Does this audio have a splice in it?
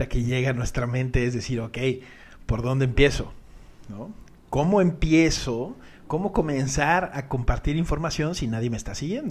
no; 0 cuts

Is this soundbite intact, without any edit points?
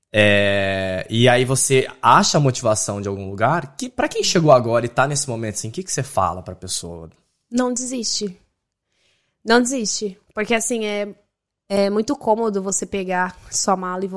yes; 0 cuts

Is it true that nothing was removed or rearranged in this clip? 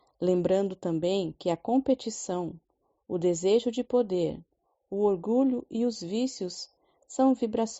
no; 1 cut; at 4.7 s

